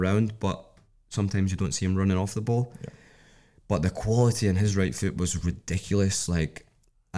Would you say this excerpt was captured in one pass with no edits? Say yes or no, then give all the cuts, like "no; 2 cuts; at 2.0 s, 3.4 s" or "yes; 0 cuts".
yes; 0 cuts